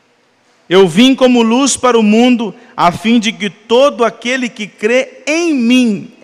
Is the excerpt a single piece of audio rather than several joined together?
yes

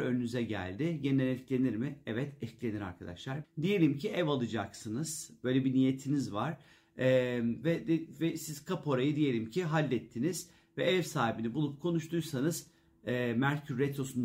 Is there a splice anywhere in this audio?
yes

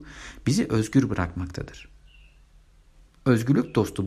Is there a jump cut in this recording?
no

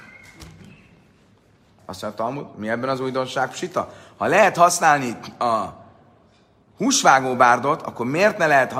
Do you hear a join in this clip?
yes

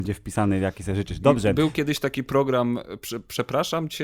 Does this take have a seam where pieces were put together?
no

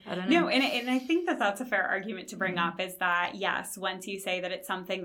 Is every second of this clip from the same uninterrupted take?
yes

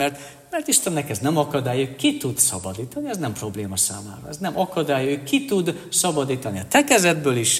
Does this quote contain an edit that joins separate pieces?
no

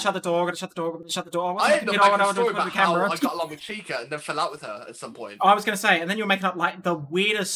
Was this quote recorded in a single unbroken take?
yes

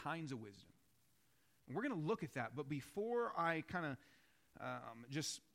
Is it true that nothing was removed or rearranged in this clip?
yes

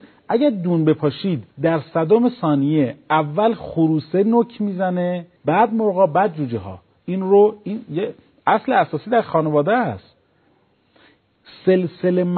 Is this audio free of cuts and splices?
no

